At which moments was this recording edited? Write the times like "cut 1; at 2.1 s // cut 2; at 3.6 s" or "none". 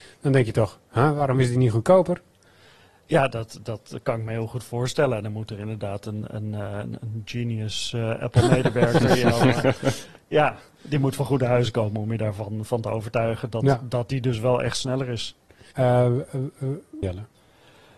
cut 1; at 15.7 s // cut 2; at 17.0 s

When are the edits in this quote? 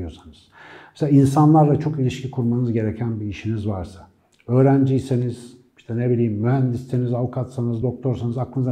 none

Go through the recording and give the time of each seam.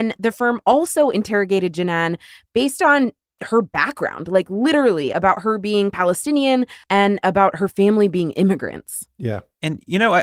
cut 1; at 6.8 s

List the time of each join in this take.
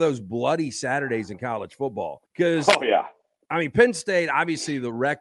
cut 1; at 2.3 s

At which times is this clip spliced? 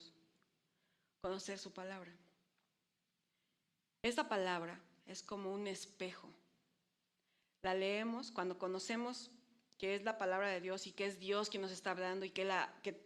none

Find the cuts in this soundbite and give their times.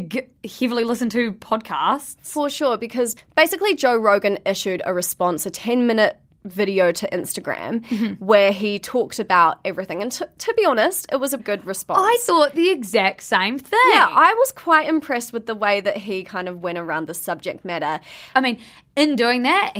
cut 1; at 11.4 s // cut 2; at 18.3 s

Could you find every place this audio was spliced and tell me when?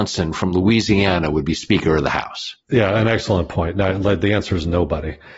cut 1; at 2.6 s

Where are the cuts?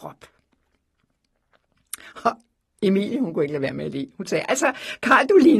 none

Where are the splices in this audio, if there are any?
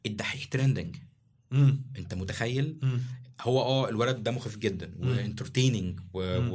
none

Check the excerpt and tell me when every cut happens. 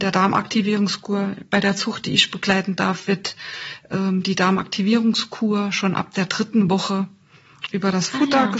none

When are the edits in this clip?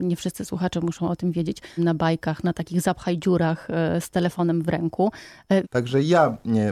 cut 1; at 1.8 s // cut 2; at 5.6 s

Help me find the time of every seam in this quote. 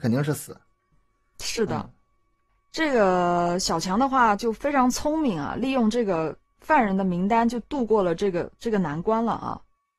none

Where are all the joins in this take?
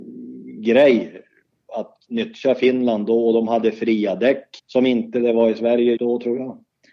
cut 1; at 4.6 s // cut 2; at 6.0 s

